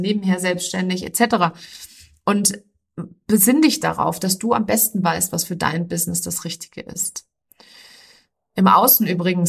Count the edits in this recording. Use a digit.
0